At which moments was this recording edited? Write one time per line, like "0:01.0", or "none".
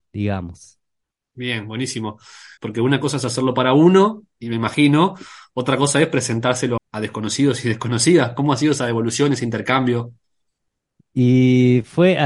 0:02.6
0:06.8